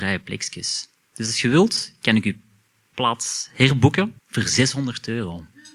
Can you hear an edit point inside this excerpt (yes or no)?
yes